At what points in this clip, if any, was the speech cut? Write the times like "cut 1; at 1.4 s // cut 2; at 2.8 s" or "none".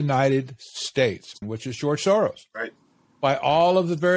cut 1; at 1.4 s